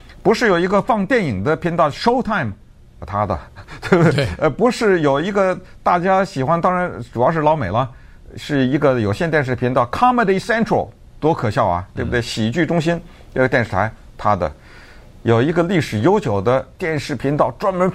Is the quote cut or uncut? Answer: uncut